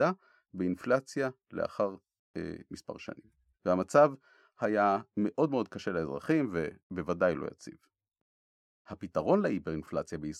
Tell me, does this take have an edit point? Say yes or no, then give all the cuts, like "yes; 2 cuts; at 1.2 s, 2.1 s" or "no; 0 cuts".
yes; 2 cuts; at 3.5 s, 6.8 s